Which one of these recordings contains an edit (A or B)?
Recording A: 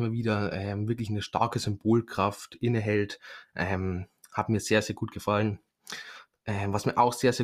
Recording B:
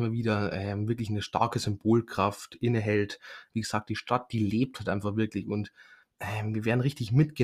B